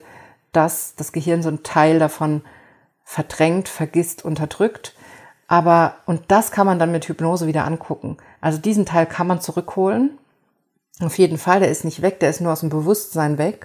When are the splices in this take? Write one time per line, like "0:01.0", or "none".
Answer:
none